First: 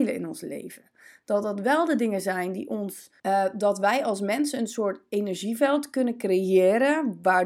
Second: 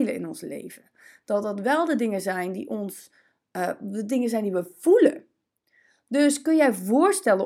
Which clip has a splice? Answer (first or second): first